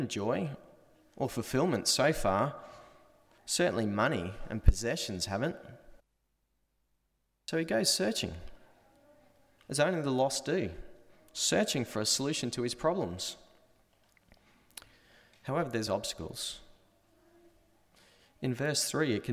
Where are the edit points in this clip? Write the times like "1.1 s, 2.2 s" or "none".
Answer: 15.9 s